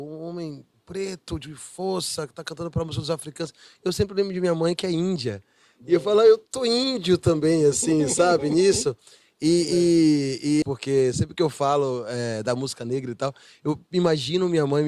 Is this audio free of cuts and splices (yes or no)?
no